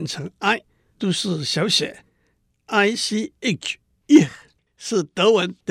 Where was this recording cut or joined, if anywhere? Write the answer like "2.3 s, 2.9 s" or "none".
none